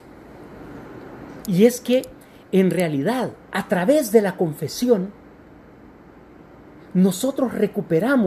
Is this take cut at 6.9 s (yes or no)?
no